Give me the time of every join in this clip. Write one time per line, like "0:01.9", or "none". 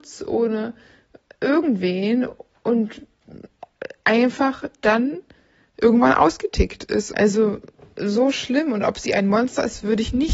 0:07.1